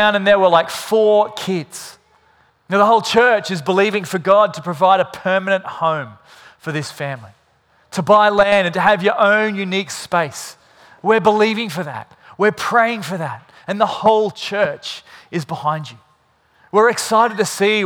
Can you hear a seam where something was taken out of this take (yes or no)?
yes